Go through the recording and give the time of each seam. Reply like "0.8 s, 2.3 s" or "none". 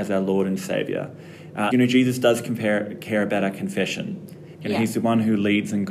1.7 s, 4.5 s